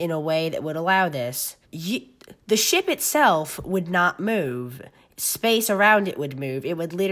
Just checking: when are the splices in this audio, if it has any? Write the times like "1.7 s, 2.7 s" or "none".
1.6 s